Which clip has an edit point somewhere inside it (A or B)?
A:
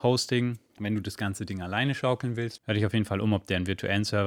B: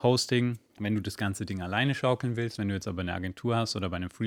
A